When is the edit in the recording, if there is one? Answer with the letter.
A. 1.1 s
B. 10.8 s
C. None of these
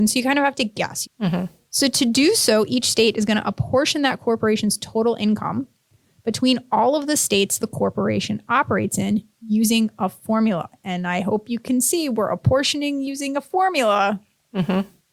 A